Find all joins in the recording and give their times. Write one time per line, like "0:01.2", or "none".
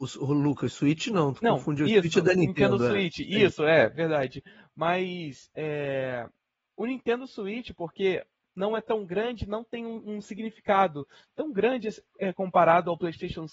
none